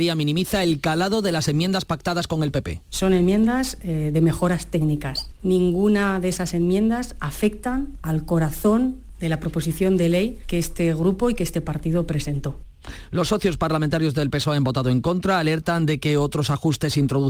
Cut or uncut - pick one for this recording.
uncut